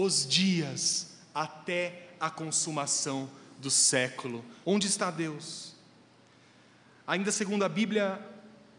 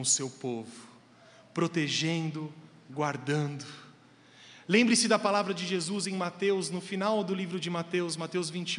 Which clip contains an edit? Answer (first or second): first